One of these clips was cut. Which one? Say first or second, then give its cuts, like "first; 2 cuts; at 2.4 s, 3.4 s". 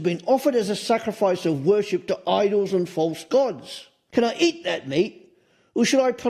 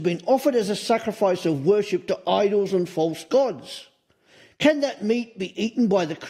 first; 1 cut; at 4.1 s